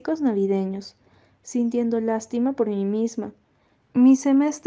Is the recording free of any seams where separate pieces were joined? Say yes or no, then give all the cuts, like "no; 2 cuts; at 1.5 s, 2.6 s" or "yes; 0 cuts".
yes; 0 cuts